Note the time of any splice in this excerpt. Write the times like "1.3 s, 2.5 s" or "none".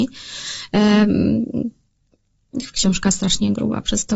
2.7 s

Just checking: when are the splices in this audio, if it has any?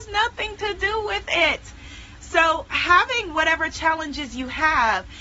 2.2 s

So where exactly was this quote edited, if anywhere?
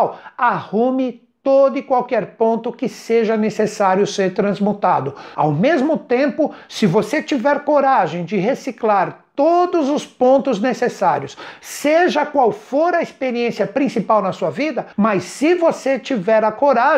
5.3 s, 14.9 s

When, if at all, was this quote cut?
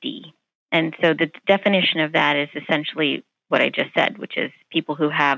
none

